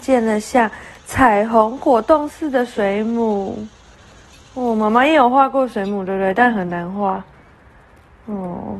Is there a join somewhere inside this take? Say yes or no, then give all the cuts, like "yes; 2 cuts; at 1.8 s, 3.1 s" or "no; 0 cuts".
no; 0 cuts